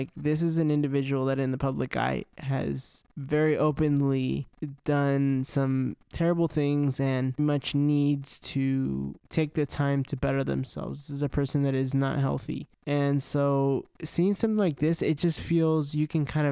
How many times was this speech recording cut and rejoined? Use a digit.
1